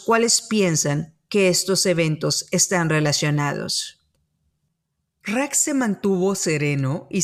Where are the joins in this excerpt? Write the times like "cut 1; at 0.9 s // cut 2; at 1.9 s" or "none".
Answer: none